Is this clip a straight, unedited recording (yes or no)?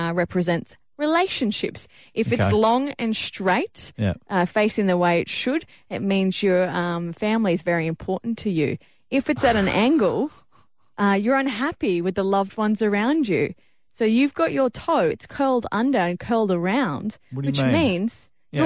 yes